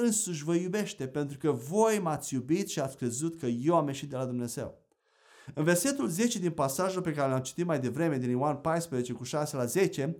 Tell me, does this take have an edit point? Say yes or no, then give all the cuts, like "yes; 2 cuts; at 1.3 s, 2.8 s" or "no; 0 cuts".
no; 0 cuts